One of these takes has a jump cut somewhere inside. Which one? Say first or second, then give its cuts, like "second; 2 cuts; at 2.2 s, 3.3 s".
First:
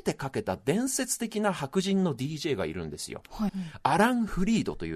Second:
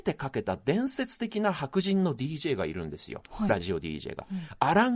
first; 1 cut; at 3.5 s